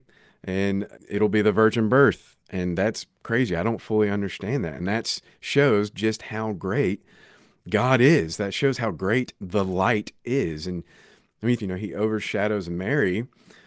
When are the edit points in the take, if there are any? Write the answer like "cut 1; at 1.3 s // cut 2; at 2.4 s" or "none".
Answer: cut 1; at 1.0 s // cut 2; at 11.6 s